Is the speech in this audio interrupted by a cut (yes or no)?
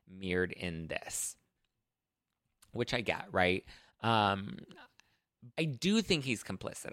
yes